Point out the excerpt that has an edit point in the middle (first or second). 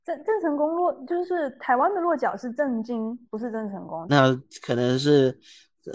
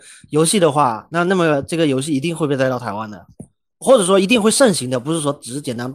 first